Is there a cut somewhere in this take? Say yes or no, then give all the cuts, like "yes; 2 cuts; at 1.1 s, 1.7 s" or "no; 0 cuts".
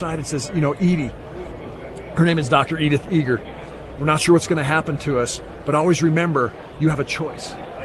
yes; 1 cut; at 4.0 s